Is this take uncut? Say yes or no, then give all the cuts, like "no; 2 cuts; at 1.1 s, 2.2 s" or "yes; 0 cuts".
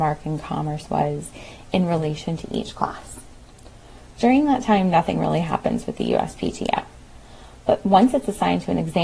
no; 1 cut; at 4.1 s